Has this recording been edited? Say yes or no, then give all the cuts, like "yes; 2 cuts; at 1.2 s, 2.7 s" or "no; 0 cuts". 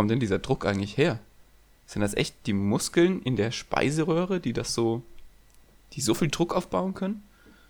no; 0 cuts